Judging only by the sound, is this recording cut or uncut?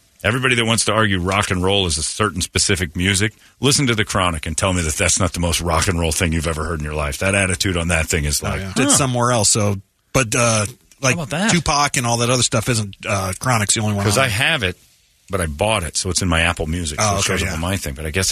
cut